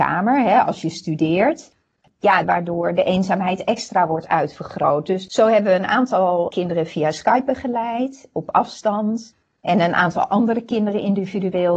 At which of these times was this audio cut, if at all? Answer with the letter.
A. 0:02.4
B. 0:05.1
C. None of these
A